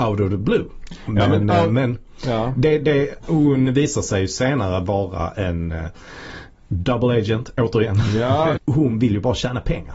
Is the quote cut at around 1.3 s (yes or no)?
no